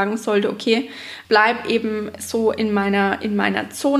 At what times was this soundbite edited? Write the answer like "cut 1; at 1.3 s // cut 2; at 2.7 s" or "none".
cut 1; at 1.2 s